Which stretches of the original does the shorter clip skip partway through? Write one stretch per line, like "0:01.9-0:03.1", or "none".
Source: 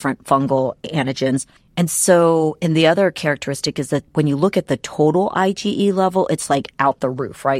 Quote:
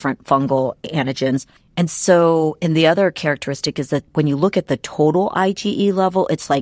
none